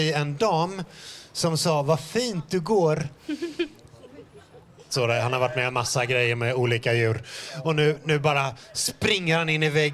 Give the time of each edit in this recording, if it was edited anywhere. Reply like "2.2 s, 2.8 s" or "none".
4.9 s